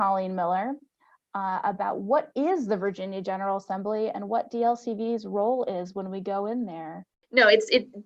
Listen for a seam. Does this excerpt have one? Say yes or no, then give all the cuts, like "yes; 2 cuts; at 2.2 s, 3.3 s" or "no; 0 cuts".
no; 0 cuts